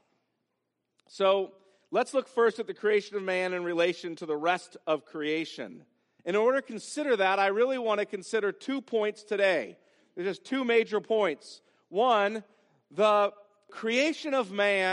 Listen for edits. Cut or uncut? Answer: cut